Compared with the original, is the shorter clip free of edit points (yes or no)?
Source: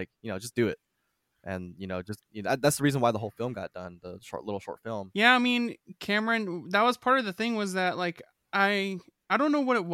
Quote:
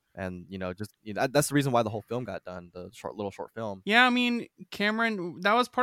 yes